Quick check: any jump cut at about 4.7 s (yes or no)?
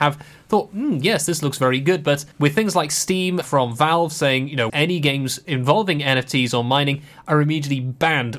yes